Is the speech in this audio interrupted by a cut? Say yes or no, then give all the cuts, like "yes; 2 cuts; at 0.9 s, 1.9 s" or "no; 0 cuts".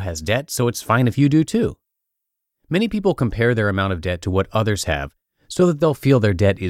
no; 0 cuts